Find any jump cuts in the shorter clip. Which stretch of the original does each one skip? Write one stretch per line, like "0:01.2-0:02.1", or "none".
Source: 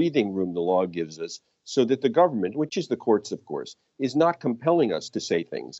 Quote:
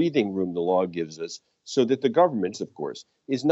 0:02.5-0:03.2

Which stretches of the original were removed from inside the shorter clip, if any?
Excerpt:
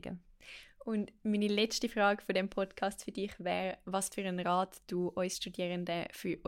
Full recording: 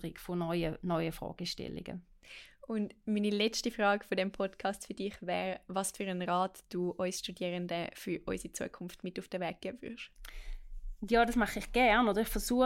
none

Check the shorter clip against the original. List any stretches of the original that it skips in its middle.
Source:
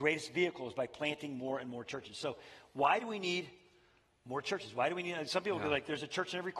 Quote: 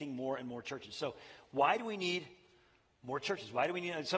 none

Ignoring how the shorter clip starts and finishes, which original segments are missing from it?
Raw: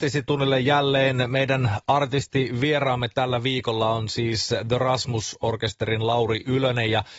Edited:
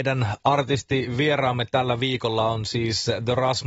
none

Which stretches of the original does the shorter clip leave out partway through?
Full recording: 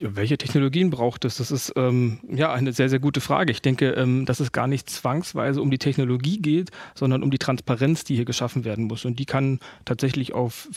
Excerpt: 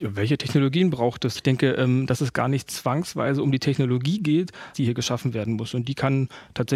0:01.3-0:03.5
0:06.9-0:08.0

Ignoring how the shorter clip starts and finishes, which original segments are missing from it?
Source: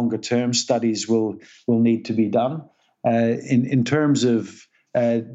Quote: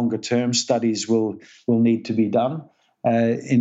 none

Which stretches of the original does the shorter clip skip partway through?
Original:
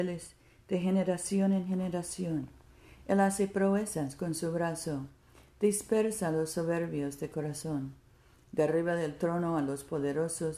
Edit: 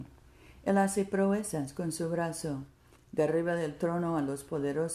0:05.4-0:08.3

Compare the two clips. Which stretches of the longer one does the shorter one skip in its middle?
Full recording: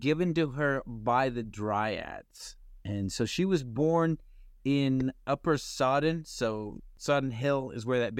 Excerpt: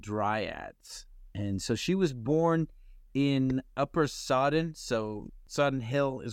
none

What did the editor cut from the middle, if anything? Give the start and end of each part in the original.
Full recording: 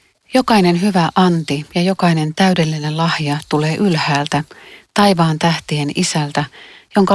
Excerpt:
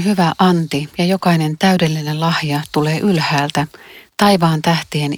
none

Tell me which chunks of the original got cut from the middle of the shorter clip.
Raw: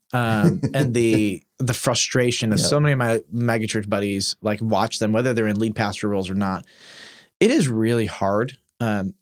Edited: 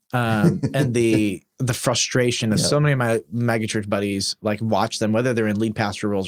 none

